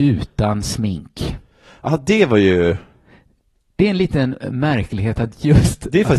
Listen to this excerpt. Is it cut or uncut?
uncut